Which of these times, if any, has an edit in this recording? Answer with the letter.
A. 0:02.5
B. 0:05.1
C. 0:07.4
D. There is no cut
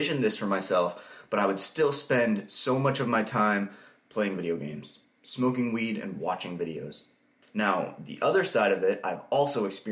C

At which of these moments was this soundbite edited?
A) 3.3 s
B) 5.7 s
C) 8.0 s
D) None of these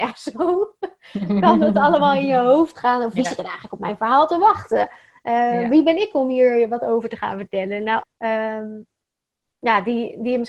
C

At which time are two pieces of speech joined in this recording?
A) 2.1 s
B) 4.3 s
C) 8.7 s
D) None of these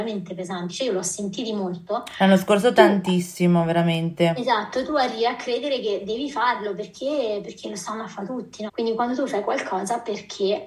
C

